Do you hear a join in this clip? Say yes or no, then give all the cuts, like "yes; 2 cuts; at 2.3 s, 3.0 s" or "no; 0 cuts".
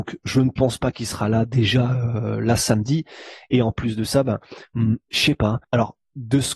yes; 1 cut; at 5.6 s